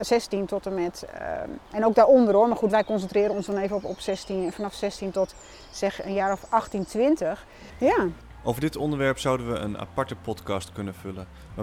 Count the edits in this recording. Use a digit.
1